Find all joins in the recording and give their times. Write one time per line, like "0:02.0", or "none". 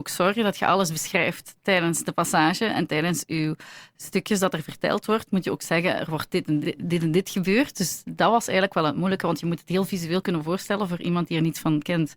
none